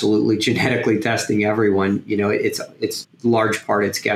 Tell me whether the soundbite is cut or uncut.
cut